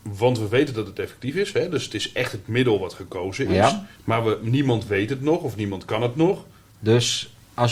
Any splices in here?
yes; 2 cuts; at 4.0 s, 6.7 s

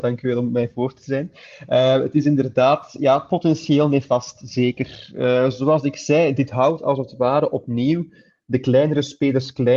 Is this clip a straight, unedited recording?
yes; 0 cuts

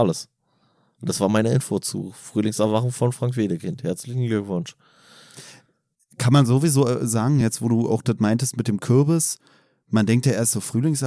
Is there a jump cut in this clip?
no; 0 cuts

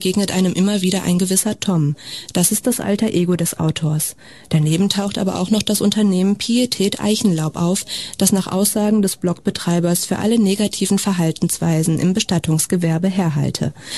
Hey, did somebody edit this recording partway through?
no; 0 cuts

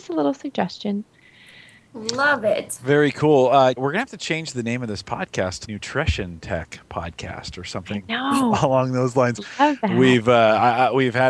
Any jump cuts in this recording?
yes; 2 cuts; at 3.8 s, 5.6 s

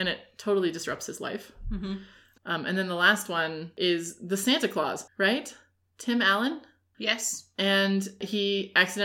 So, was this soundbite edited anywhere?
yes; 2 cuts; at 2.4 s, 5.1 s

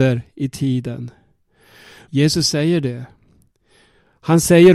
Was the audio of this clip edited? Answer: yes; 1 cut; at 2.1 s

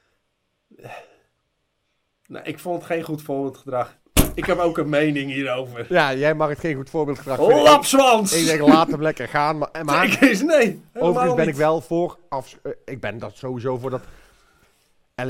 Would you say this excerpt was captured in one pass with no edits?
yes; 0 cuts

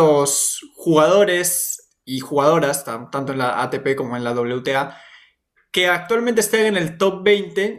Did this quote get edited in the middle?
no; 0 cuts

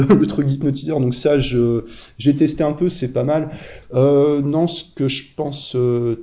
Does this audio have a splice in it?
yes; 1 cut; at 3.8 s

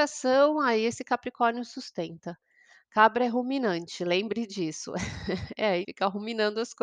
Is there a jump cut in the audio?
yes; 1 cut; at 5.8 s

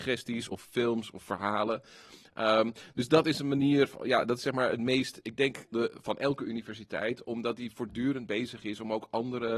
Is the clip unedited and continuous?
no; 1 cut; at 5.7 s

